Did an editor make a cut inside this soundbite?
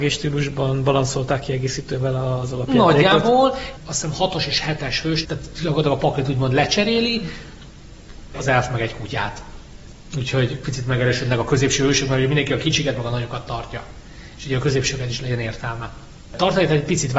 yes; 3 cuts; at 3.8 s, 5.2 s, 8.3 s

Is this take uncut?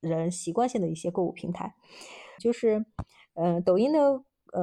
no; 1 cut; at 2.4 s

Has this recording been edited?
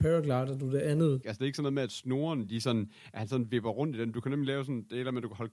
yes; 1 cut; at 1.2 s

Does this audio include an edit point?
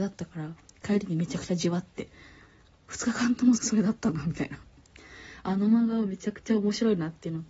yes; 1 cut; at 3.6 s

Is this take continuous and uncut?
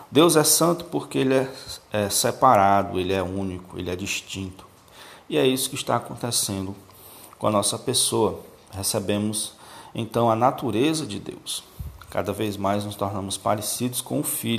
yes; 0 cuts

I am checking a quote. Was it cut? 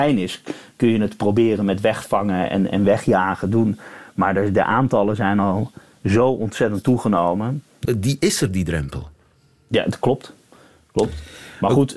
yes; 1 cut; at 7.8 s

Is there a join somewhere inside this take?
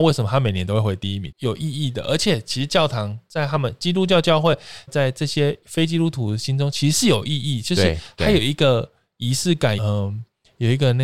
yes; 3 cuts; at 1.3 s, 4.9 s, 9.8 s

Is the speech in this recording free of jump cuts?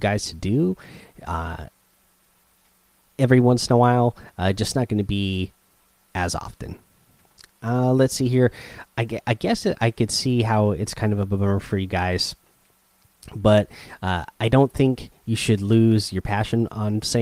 no; 1 cut; at 8.9 s

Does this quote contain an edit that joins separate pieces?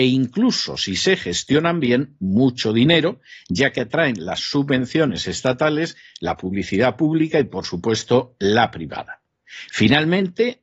yes; 1 cut; at 9.7 s

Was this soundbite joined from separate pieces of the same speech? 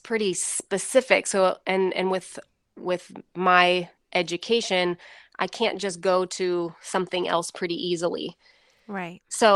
no; 0 cuts

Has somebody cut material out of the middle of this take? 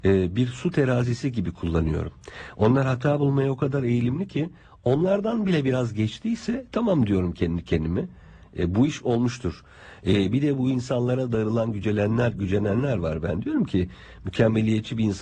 no; 0 cuts

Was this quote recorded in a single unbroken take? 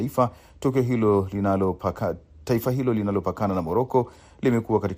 yes; 0 cuts

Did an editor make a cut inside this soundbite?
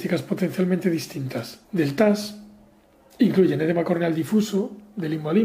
yes; 1 cut; at 1.6 s

